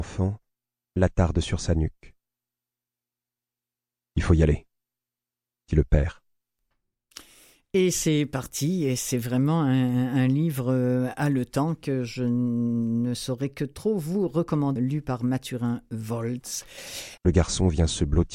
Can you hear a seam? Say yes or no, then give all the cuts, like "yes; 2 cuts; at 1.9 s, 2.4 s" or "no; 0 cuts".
yes; 2 cuts; at 14.8 s, 17.2 s